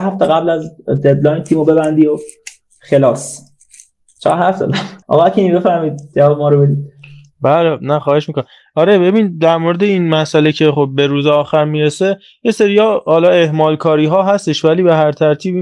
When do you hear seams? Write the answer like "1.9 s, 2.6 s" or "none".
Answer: 5.0 s